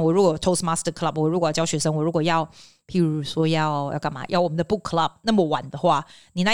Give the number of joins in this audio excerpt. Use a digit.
0